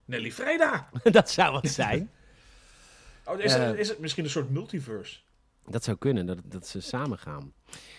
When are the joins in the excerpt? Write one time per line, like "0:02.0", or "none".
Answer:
0:06.4